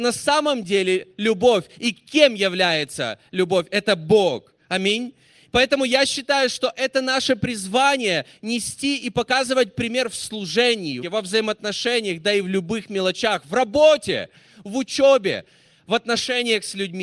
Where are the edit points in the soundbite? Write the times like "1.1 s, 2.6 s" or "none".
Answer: 11.0 s